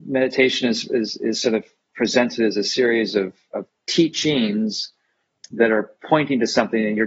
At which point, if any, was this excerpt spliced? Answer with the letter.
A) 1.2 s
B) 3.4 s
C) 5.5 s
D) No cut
D